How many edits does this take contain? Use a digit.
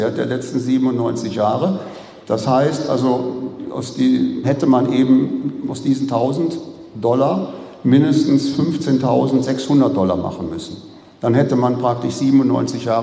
1